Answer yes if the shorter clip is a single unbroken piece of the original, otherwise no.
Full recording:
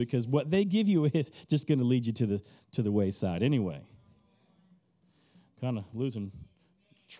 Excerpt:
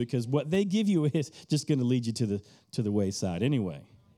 yes